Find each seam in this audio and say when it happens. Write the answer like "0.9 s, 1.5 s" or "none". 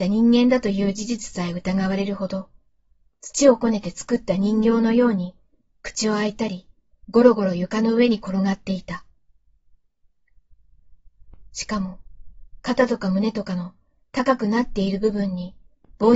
6.9 s